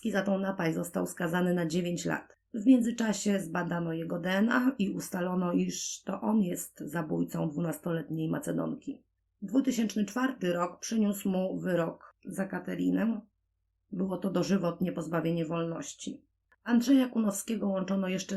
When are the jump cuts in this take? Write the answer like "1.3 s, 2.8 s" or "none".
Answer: none